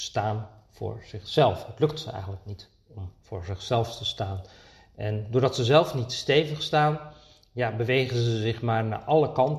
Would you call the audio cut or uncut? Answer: uncut